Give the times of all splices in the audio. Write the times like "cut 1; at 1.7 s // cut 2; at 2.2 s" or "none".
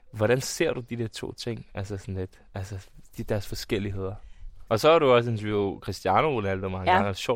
cut 1; at 4.7 s